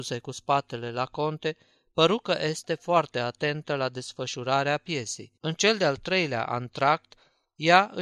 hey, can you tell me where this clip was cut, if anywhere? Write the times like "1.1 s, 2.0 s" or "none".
5.4 s